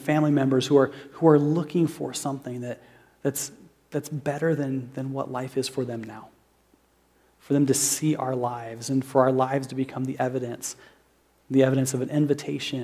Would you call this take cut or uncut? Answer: uncut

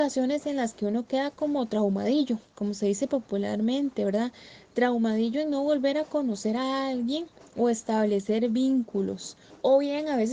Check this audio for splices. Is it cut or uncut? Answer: uncut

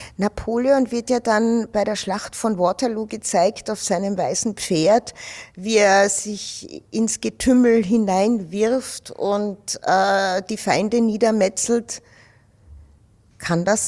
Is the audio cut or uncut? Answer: uncut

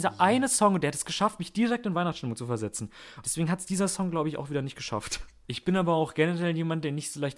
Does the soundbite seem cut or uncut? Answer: cut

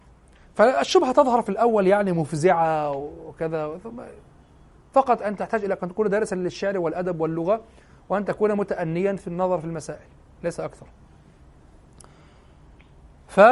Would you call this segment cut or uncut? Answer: uncut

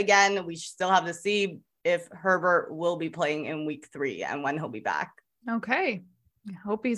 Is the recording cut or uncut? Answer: uncut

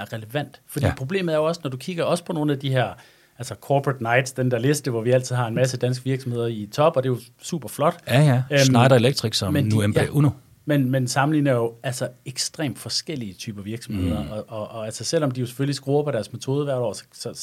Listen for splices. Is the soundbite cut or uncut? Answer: uncut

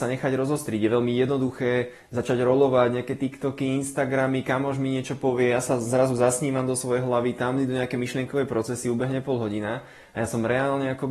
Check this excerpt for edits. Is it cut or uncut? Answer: uncut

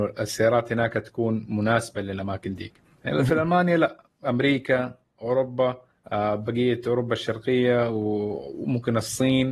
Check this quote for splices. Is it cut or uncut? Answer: uncut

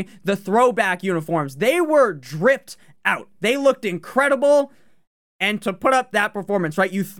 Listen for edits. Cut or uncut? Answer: uncut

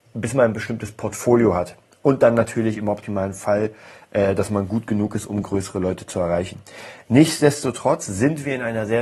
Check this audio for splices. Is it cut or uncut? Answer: uncut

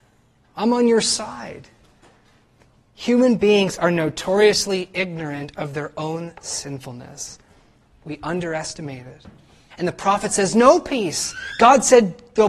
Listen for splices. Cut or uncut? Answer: cut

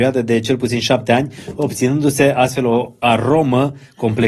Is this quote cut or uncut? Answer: uncut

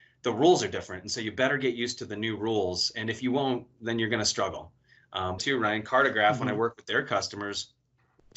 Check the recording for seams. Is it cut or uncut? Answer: cut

